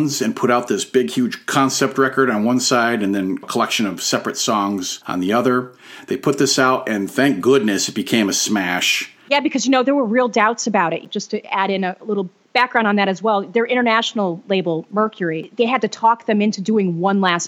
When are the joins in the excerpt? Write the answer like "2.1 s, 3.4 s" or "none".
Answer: none